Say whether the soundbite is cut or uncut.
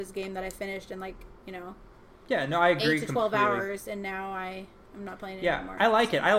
uncut